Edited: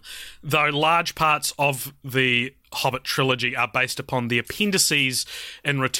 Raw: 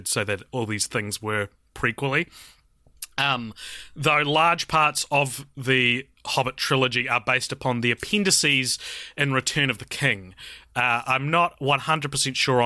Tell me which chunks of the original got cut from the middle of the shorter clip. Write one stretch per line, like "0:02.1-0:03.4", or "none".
none